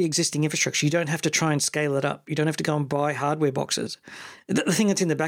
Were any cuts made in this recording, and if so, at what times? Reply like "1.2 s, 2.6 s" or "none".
none

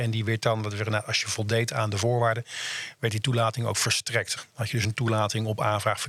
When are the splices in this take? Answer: 4.4 s

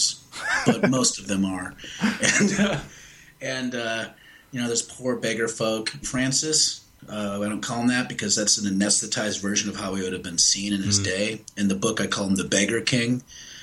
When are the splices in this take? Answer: 6.0 s

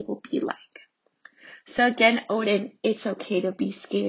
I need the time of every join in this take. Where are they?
none

